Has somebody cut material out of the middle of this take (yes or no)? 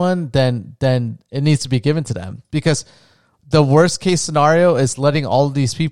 no